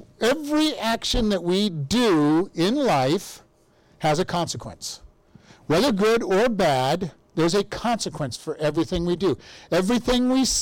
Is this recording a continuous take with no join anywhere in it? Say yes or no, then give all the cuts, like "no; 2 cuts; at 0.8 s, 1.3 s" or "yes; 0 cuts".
yes; 0 cuts